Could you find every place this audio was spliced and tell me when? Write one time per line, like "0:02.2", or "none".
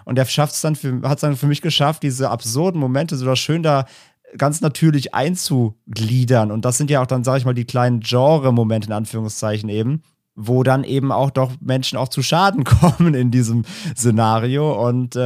none